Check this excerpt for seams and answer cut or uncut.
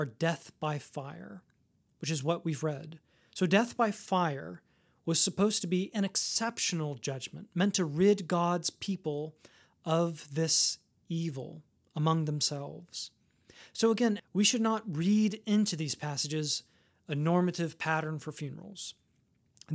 cut